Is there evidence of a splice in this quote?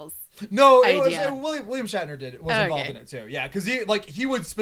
no; 0 cuts

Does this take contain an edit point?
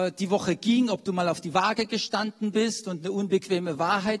no; 0 cuts

